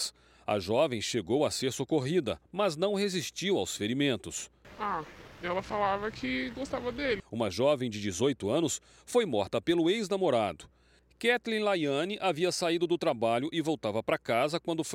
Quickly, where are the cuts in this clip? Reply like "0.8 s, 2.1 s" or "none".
7.2 s